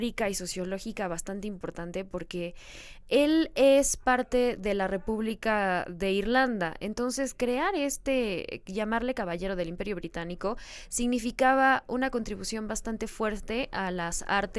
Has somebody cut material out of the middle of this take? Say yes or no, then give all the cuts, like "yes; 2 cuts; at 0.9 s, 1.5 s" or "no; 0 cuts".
no; 0 cuts